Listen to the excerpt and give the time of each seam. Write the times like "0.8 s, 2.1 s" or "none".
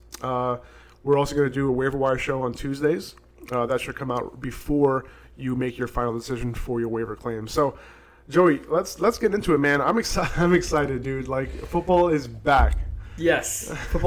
none